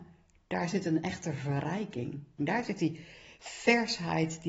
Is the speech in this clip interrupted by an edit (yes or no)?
yes